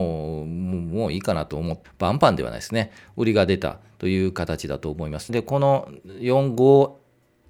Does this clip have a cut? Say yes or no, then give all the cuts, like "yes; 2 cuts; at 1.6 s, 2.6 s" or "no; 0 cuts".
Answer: yes; 2 cuts; at 1.8 s, 5.3 s